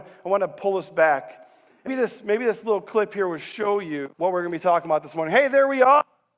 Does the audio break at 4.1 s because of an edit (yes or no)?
yes